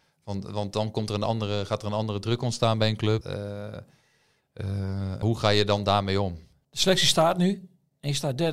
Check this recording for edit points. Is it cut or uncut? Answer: cut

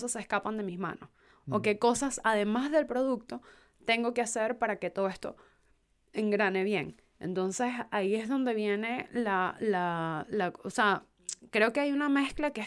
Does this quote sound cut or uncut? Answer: uncut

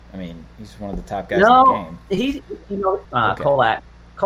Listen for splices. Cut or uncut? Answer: cut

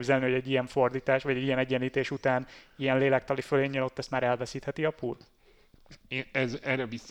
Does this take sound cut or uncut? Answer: cut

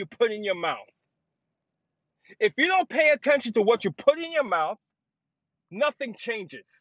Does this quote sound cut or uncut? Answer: uncut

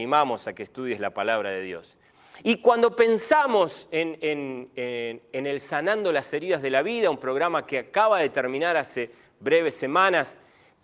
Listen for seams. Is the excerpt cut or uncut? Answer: uncut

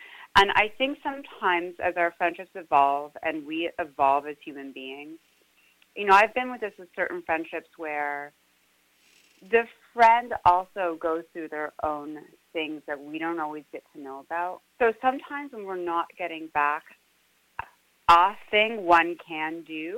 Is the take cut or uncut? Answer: cut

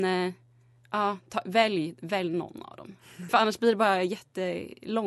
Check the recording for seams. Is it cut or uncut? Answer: cut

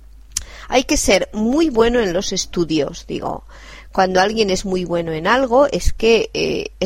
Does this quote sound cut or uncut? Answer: uncut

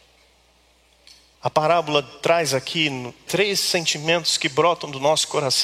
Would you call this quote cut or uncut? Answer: cut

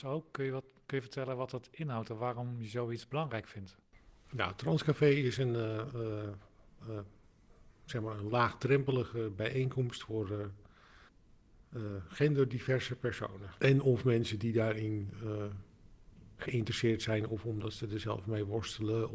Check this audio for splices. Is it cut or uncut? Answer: cut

